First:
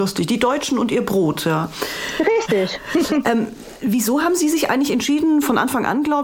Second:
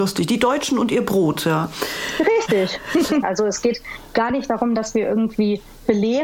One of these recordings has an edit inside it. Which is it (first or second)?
second